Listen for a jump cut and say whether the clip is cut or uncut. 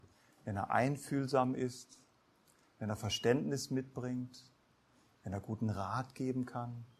uncut